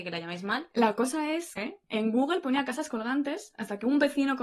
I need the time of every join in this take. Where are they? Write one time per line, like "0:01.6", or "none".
0:01.6